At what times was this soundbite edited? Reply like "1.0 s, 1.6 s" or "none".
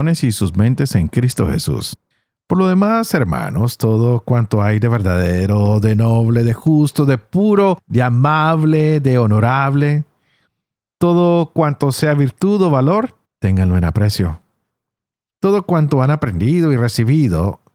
none